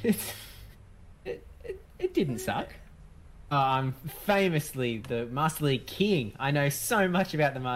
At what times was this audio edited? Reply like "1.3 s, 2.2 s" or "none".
3.5 s, 5.0 s